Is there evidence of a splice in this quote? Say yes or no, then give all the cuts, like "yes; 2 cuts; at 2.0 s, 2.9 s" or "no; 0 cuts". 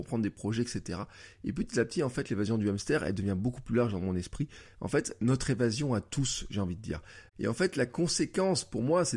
yes; 1 cut; at 7.3 s